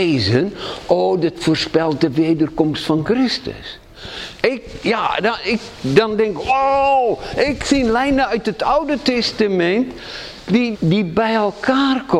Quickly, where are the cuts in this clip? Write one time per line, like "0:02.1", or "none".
0:04.4
0:10.7